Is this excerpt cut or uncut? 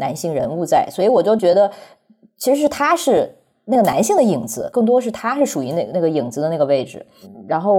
uncut